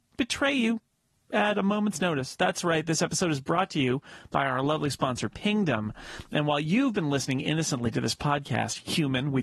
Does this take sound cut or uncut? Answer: uncut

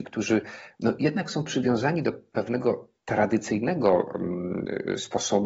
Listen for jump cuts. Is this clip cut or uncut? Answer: cut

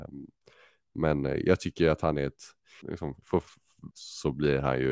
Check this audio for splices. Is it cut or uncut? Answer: cut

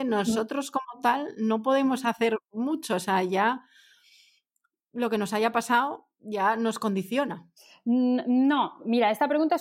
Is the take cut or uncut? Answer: uncut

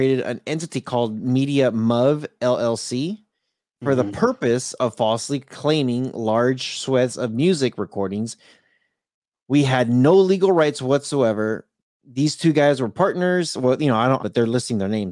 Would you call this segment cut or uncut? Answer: cut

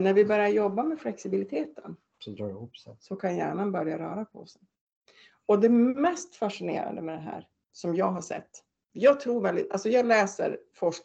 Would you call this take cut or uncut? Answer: uncut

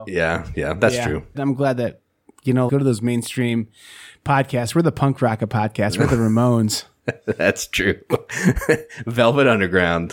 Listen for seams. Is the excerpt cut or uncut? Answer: cut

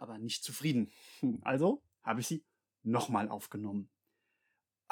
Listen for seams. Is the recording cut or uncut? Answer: uncut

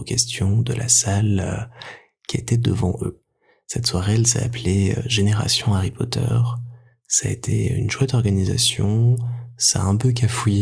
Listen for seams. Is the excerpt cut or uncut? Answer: uncut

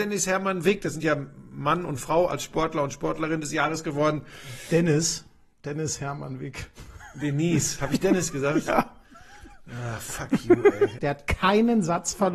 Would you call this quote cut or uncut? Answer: cut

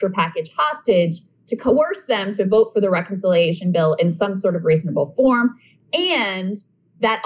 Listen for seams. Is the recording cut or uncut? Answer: uncut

